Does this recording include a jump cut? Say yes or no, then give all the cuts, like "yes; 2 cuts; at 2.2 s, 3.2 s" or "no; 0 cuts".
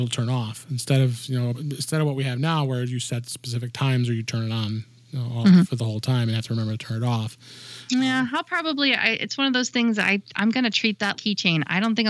yes; 2 cuts; at 1.5 s, 11.2 s